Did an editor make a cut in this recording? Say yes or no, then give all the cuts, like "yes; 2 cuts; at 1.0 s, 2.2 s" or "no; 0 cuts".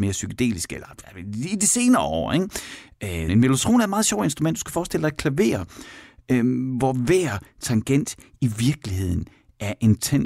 yes; 1 cut; at 3.3 s